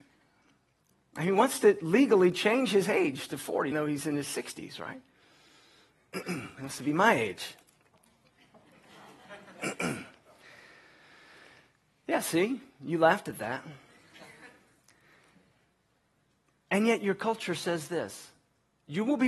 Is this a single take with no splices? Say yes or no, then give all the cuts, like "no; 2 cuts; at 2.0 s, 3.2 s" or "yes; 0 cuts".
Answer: no; 1 cut; at 3.7 s